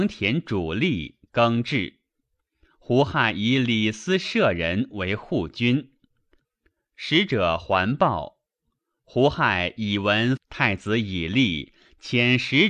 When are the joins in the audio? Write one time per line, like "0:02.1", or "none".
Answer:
0:10.4

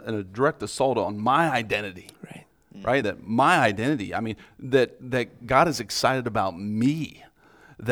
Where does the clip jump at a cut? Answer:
0:03.0

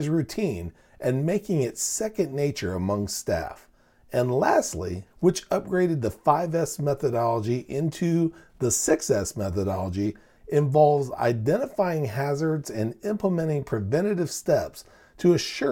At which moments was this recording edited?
0:05.1

